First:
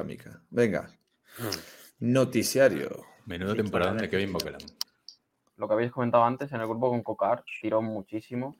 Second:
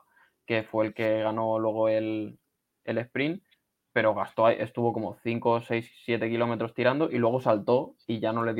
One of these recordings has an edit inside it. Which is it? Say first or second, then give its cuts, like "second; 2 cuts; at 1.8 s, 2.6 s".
first; 1 cut; at 5.5 s